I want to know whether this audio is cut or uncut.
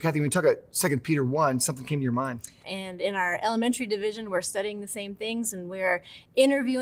cut